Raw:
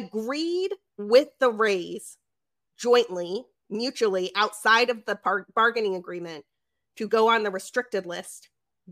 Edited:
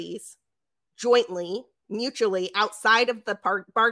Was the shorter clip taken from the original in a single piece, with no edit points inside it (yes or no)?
yes